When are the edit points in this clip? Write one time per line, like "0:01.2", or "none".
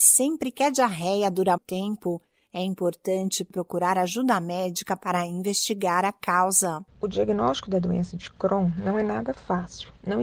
0:01.6